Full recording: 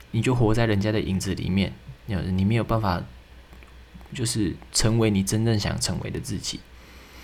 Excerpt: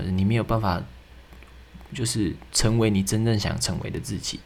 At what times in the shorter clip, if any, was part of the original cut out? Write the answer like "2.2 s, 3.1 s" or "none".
none